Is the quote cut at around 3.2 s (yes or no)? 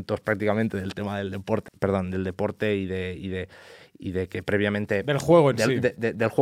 no